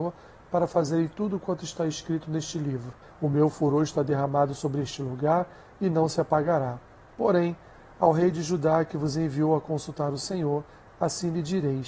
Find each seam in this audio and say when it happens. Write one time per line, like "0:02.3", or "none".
0:03.0